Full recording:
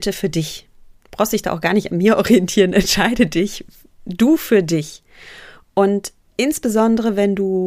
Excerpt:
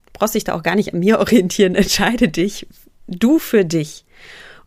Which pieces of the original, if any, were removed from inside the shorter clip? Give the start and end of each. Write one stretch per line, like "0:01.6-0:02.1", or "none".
none